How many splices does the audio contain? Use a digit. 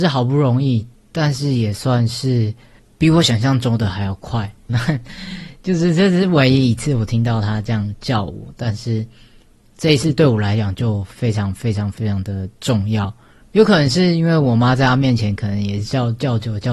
2